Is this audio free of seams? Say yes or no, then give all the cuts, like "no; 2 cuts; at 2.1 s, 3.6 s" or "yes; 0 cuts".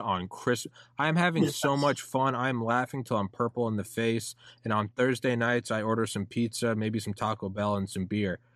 yes; 0 cuts